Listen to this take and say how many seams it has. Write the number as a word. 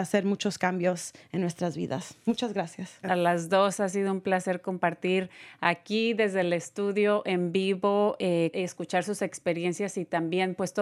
two